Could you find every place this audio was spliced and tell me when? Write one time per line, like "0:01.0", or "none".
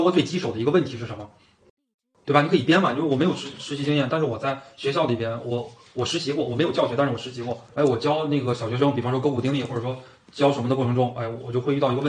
0:07.7